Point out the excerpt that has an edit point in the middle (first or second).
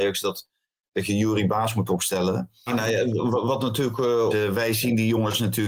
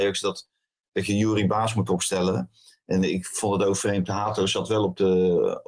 first